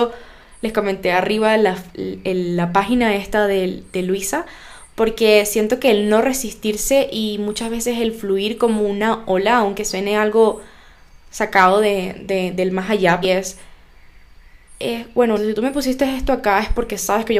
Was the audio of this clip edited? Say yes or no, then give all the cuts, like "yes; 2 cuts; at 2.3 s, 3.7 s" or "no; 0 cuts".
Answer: yes; 2 cuts; at 13.2 s, 15.4 s